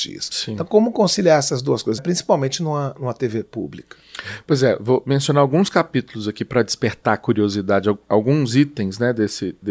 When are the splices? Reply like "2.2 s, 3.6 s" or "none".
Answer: 2.0 s